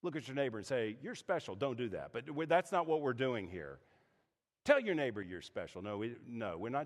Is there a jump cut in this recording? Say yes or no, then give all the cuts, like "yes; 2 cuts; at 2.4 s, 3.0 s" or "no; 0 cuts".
no; 0 cuts